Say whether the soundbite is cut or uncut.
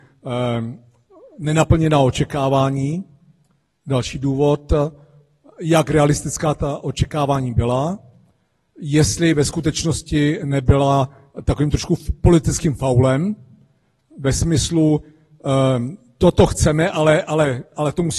uncut